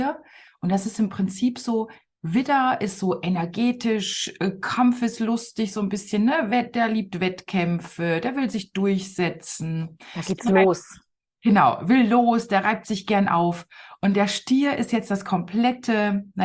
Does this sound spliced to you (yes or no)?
no